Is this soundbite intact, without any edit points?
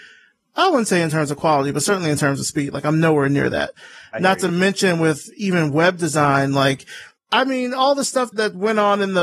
yes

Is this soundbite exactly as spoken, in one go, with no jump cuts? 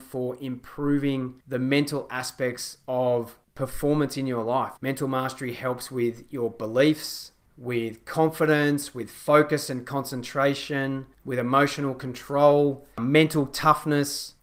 no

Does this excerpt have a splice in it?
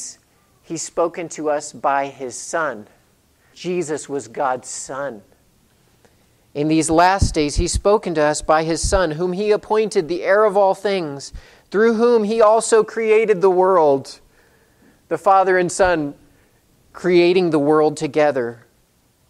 yes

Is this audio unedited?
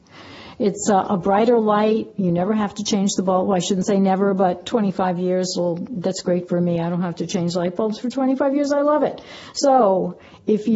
yes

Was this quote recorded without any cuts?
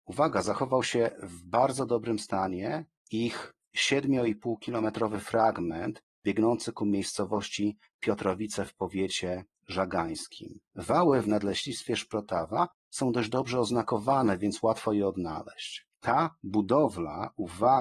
yes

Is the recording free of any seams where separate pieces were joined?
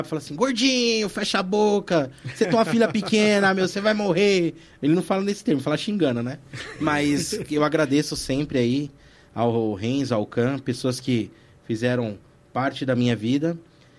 yes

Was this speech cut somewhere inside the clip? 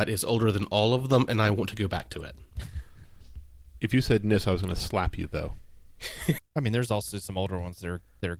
yes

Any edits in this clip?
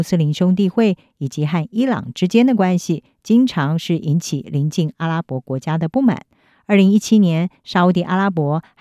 no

